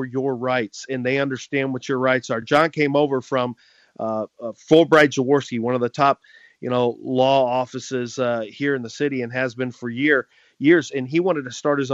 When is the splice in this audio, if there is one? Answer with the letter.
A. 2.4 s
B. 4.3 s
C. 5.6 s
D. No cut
D